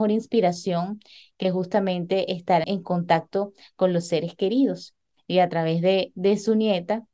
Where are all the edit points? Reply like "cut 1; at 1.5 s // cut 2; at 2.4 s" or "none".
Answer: cut 1; at 2.6 s